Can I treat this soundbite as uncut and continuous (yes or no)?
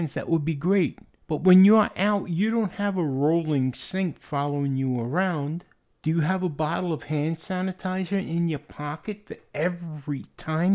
yes